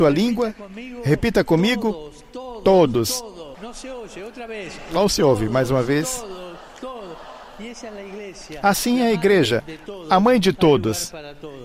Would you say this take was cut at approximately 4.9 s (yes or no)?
no